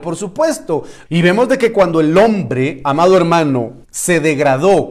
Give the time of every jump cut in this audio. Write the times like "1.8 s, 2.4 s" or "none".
1.1 s, 3.8 s